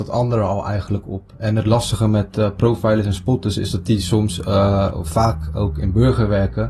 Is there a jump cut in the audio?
no; 0 cuts

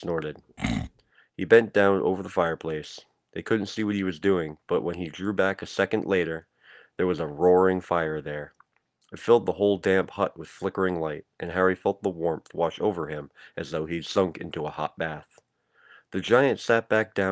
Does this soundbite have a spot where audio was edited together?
no; 0 cuts

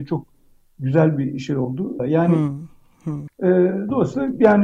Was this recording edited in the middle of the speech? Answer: yes; 2 cuts; at 2.0 s, 3.3 s

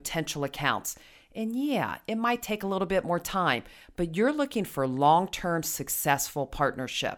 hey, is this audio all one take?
yes; 0 cuts

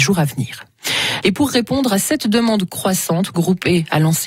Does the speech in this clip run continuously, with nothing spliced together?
no; 1 cut; at 1.2 s

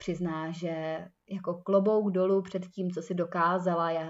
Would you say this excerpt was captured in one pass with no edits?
yes; 0 cuts

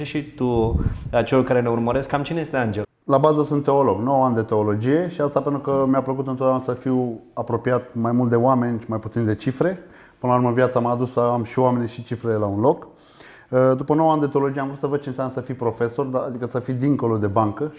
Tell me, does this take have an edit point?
yes; 1 cut; at 2.8 s

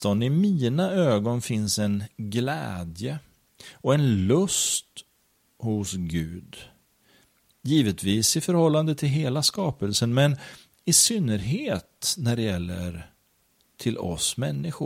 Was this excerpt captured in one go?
yes; 0 cuts

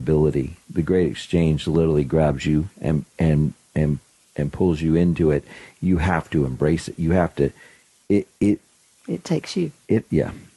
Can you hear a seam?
no; 0 cuts

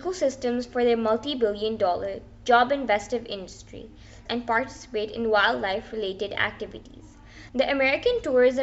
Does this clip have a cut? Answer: yes; 2 cuts; at 4.3 s, 7.5 s

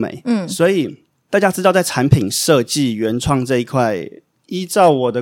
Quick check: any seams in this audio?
no; 0 cuts

